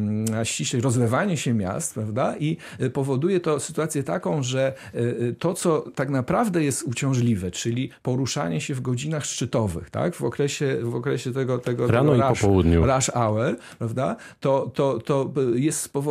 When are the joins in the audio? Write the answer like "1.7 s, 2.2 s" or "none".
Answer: none